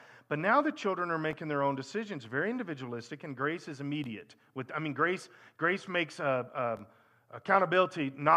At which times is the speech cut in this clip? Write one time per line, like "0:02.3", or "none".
none